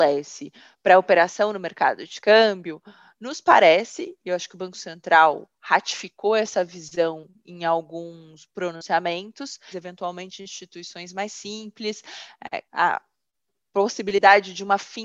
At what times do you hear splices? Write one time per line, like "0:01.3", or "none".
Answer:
0:09.7
0:12.7